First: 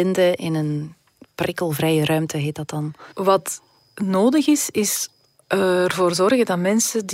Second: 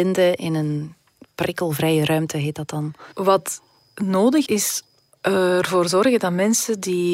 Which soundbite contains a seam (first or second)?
second